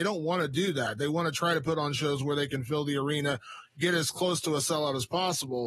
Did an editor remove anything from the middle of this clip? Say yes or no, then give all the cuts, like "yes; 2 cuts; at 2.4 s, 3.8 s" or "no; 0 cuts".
no; 0 cuts